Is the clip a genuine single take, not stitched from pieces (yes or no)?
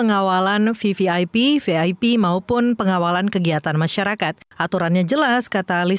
no